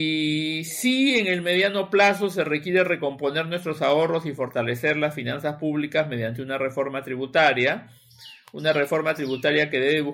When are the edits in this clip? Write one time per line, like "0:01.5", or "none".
none

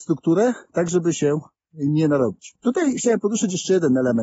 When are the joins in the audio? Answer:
none

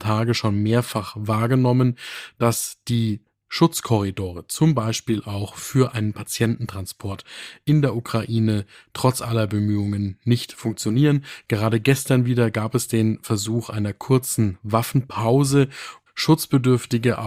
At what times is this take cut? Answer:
0:16.1

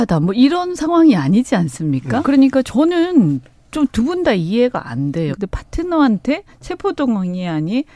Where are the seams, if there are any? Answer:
0:02.2
0:05.3

